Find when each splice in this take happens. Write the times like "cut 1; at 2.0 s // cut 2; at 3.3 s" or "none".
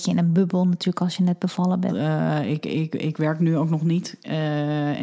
cut 1; at 1.9 s